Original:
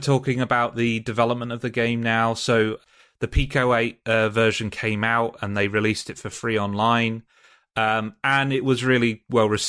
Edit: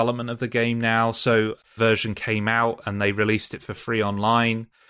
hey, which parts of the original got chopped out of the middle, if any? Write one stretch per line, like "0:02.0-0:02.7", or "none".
0:03.0-0:04.3